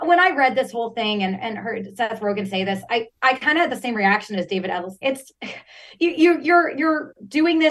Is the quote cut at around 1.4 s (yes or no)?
no